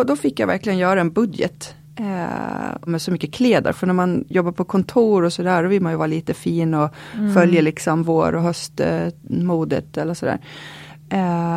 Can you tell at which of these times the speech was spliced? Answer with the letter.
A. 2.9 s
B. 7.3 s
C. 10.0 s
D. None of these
A